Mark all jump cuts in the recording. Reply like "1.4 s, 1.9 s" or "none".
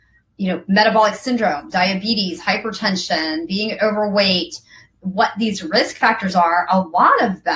none

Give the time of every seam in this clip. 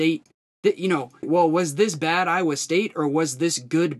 1.2 s

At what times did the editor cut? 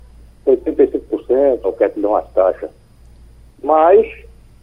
1.6 s

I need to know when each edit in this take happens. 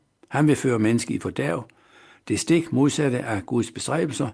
none

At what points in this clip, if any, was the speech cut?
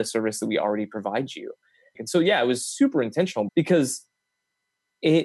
2.0 s, 3.5 s

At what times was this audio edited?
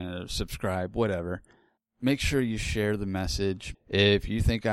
3.7 s

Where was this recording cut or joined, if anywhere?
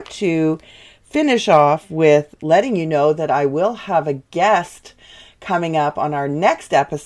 2.4 s

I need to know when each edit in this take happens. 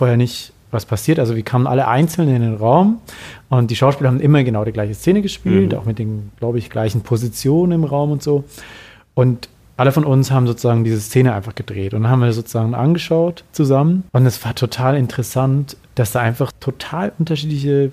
14.1 s, 16.5 s

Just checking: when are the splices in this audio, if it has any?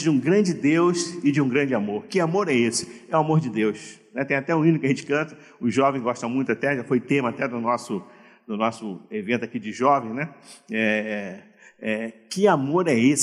none

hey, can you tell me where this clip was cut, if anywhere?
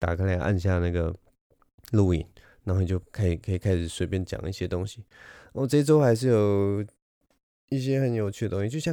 none

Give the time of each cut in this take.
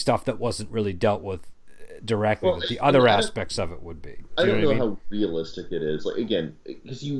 none

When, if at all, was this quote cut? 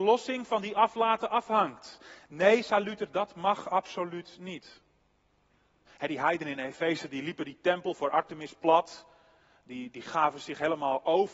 5.9 s

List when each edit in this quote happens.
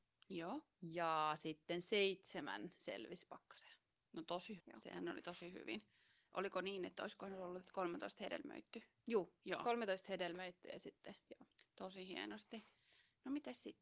4.6 s

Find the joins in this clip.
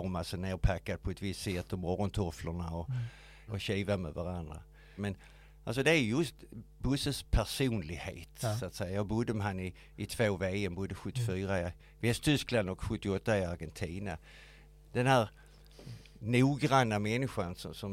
3.5 s, 5.0 s

